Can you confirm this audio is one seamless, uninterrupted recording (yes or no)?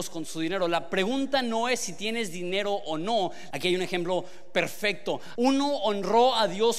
no